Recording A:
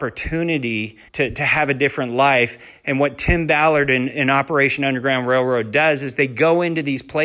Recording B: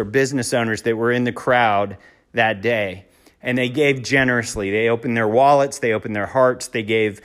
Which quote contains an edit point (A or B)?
A